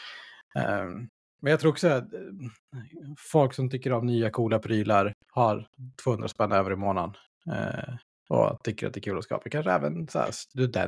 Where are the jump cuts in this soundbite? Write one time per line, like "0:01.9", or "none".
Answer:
0:05.2

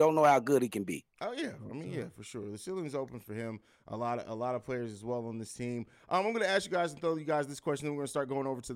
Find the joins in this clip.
none

